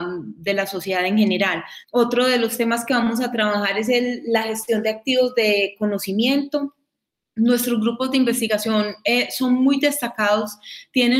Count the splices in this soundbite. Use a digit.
1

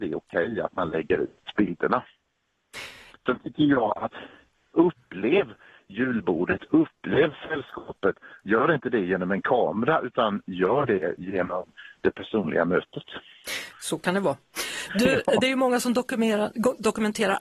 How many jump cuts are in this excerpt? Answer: 1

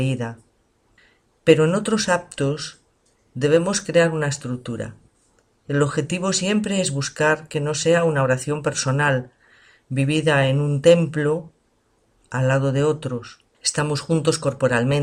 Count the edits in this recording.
1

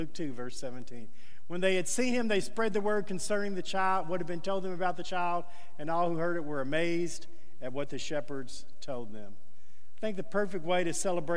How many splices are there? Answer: 0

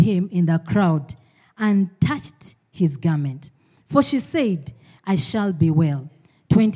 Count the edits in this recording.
1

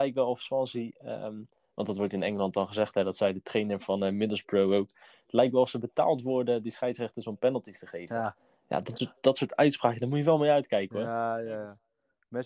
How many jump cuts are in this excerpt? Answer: 0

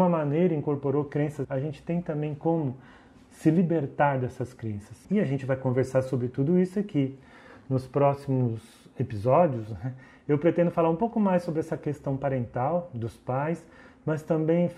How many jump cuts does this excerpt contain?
2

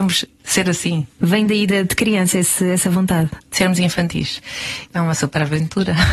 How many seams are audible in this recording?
3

